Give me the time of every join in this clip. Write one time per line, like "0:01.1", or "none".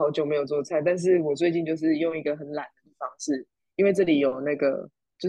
none